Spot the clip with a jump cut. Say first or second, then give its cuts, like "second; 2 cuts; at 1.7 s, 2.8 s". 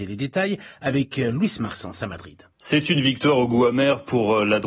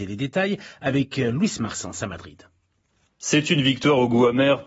first; 1 cut; at 2.5 s